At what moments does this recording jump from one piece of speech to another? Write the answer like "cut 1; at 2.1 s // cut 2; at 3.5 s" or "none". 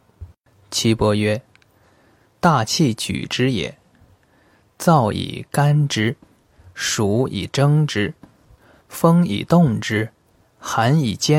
cut 1; at 10.4 s